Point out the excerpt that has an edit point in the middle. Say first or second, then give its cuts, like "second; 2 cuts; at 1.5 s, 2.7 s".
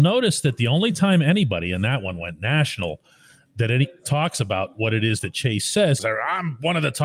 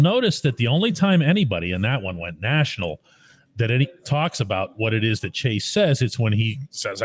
first; 1 cut; at 6.0 s